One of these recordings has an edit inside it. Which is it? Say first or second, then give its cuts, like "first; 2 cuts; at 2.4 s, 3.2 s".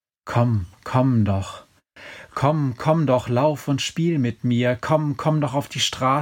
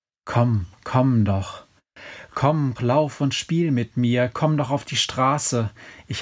second; 2 cuts; at 2.8 s, 4.3 s